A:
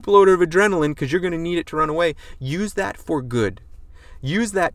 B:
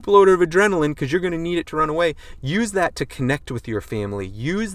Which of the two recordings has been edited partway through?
B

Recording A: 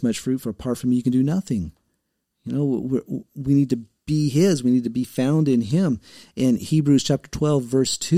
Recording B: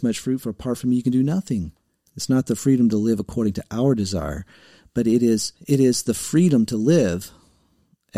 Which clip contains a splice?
B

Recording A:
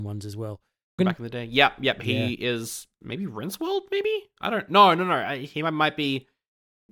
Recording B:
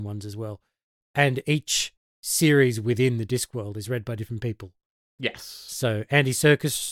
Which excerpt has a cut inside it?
A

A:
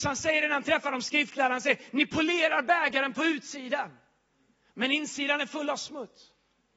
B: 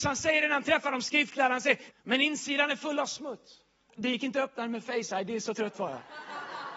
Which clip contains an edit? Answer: B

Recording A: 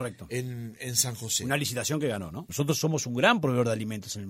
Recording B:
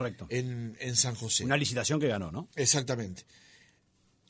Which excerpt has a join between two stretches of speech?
A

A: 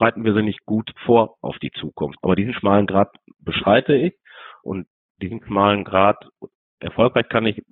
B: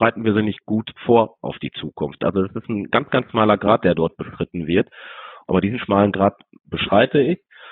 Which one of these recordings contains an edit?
A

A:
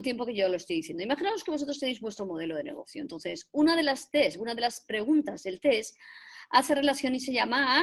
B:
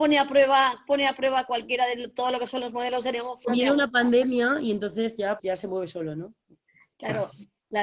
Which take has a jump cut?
B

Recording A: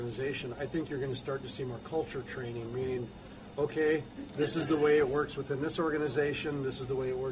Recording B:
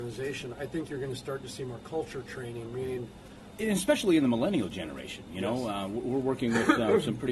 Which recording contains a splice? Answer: B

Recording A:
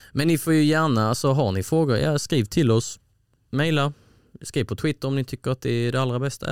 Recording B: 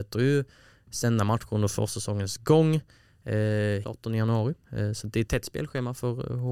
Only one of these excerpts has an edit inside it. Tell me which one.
B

